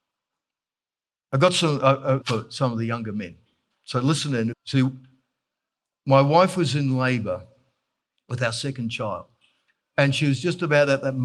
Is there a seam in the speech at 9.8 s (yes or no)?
no